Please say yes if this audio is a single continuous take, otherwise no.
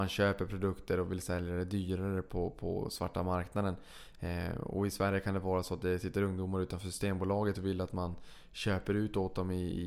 yes